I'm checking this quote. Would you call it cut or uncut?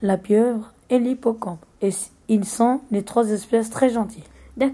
uncut